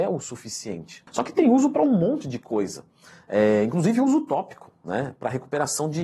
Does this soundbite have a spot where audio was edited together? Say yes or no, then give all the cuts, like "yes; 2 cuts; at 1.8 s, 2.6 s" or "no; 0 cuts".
no; 0 cuts